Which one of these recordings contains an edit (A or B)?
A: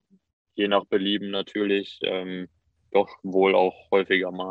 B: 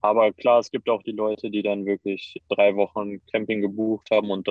B